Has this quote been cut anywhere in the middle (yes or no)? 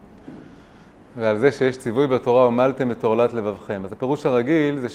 no